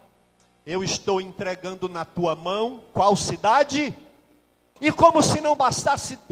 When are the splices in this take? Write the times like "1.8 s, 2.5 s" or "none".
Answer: 4.8 s